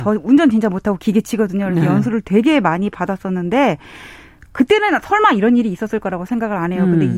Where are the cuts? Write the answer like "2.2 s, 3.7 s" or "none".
none